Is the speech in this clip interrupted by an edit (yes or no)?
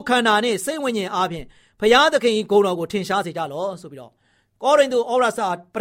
no